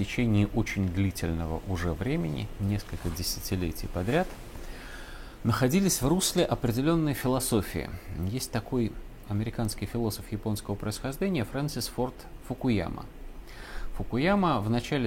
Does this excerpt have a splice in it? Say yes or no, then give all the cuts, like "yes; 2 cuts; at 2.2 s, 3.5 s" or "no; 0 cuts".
no; 0 cuts